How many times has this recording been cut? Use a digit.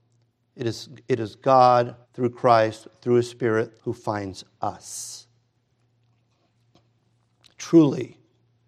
2